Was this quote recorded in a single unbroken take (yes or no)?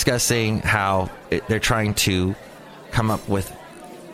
no